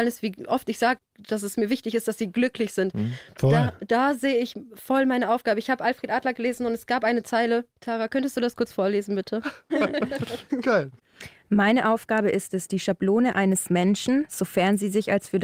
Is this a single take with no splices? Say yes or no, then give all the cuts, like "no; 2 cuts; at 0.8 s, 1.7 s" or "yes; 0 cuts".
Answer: no; 1 cut; at 9.7 s